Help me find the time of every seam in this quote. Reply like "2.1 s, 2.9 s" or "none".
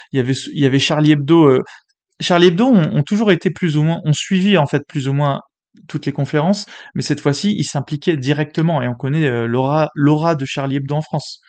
none